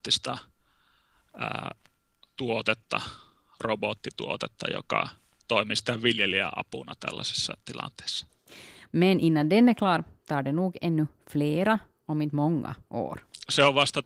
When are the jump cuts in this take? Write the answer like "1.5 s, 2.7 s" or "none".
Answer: 8.9 s